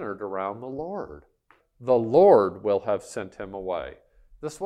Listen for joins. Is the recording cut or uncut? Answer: cut